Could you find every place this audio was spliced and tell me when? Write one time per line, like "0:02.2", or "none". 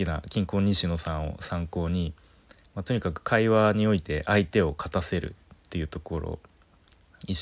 0:02.7

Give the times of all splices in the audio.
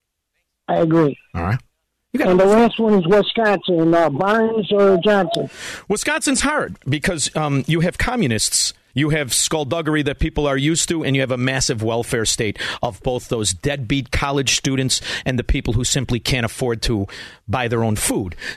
0:08.9

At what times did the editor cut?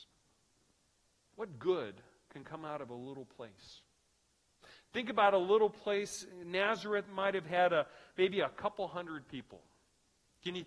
0:01.3

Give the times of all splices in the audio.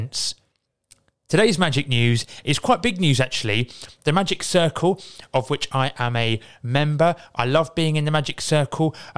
none

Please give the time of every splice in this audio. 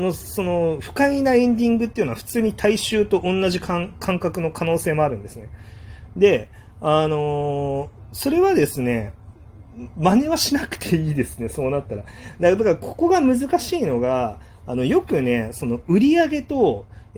none

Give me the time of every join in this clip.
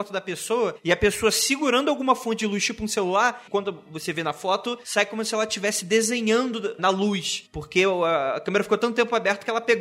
0:03.5

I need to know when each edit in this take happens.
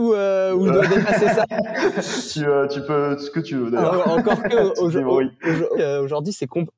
0:05.8

